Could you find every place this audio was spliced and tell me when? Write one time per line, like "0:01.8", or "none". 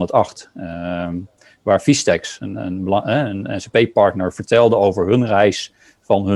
none